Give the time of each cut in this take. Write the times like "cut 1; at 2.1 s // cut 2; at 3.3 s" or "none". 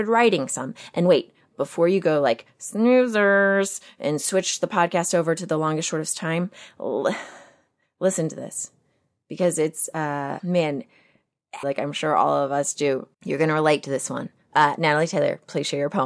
cut 1; at 10.4 s // cut 2; at 11.6 s // cut 3; at 13.1 s